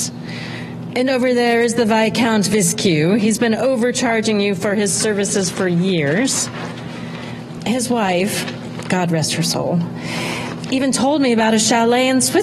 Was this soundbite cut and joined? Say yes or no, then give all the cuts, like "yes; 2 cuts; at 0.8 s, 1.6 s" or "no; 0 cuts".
no; 0 cuts